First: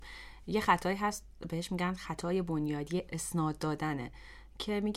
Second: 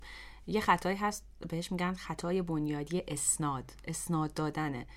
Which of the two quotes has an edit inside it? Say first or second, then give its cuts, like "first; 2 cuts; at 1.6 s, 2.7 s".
first; 1 cut; at 3.1 s